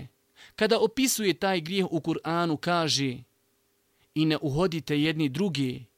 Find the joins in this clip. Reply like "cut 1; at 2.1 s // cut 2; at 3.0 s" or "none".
none